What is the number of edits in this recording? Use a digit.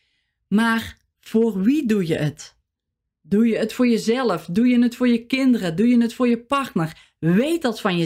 0